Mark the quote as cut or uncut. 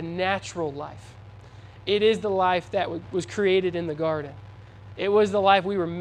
uncut